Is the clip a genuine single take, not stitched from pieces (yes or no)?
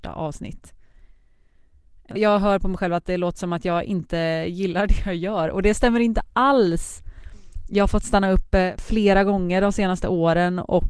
no